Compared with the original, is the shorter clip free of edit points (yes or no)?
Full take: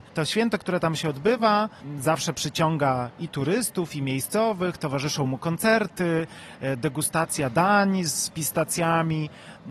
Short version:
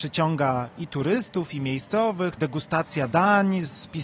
no